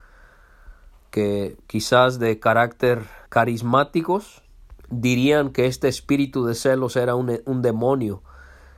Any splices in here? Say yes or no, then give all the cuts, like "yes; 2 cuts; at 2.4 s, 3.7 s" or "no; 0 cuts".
yes; 2 cuts; at 3.3 s, 4.8 s